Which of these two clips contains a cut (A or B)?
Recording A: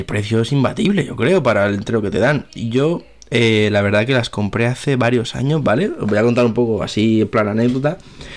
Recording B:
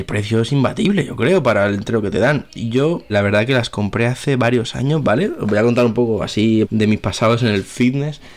B